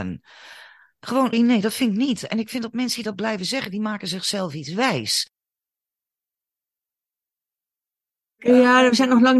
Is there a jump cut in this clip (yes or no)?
yes